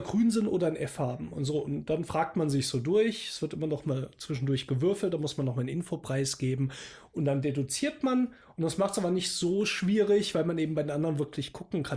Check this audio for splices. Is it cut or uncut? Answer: uncut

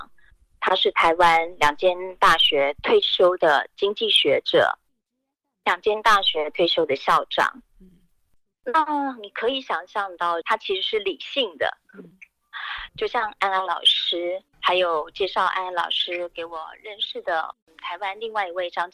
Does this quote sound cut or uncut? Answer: cut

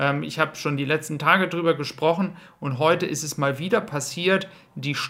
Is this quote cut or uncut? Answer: uncut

